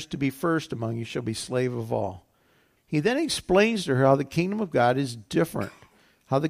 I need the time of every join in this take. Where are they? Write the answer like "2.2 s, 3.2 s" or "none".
2.8 s